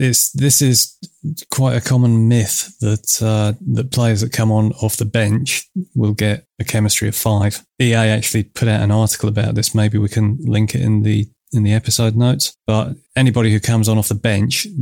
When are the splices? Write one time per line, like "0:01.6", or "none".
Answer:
0:07.7